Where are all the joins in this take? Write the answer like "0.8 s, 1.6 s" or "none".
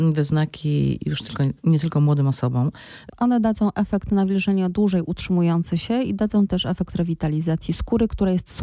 3.1 s